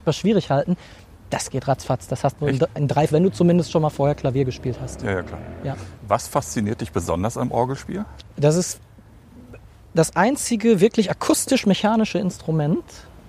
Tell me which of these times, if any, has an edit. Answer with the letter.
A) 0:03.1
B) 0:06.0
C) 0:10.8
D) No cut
A